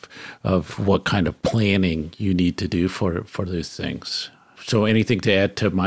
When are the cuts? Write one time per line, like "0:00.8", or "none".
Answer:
none

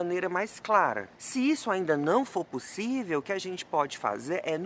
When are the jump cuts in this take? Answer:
0:01.1

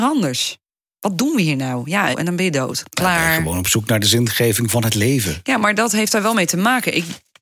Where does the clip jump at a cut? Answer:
0:02.1

